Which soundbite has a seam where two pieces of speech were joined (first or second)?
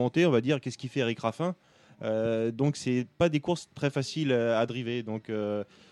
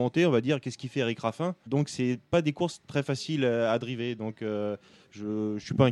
second